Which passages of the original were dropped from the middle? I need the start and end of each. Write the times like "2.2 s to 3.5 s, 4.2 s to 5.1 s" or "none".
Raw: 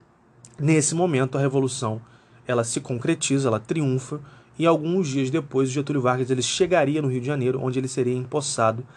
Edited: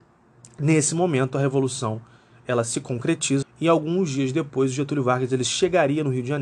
3.4 s to 4.4 s